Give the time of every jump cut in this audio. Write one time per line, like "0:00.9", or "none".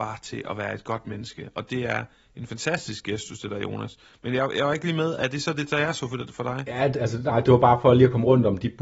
none

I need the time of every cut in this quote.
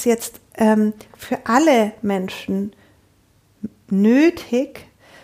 0:01.1

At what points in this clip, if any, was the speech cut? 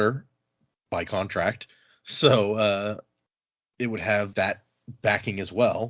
0:04.3

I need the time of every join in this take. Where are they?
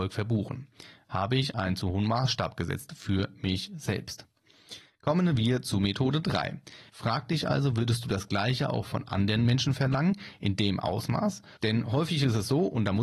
0:01.0
0:06.9
0:11.6

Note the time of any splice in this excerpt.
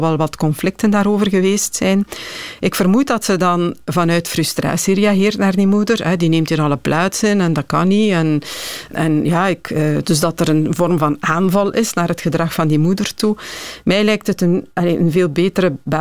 0:08.9
0:10.0

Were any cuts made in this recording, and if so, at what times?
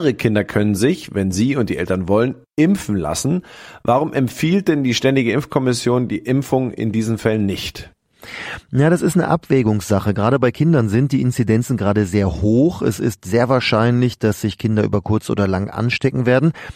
none

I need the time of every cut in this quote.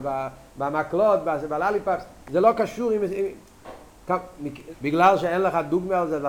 0:04.7

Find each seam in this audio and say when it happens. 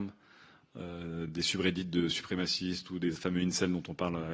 none

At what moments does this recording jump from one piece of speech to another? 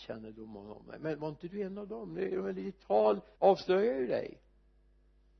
0:03.4

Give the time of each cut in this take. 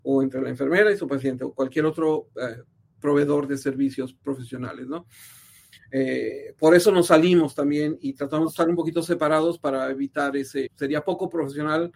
0:05.8
0:10.7

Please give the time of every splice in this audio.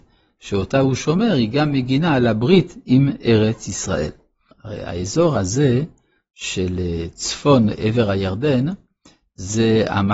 0:04.5

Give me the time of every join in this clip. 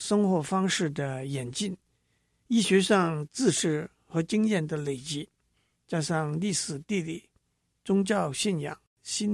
none

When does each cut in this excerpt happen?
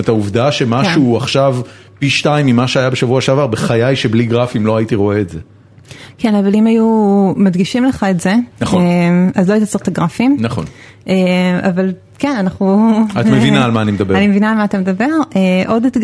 0:08.5

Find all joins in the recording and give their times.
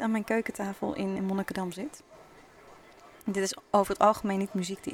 0:01.2

